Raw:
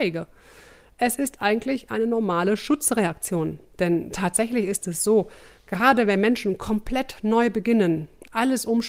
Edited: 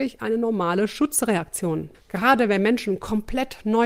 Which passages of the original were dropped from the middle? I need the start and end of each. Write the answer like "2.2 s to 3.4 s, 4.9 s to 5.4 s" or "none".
3.6 s to 5.5 s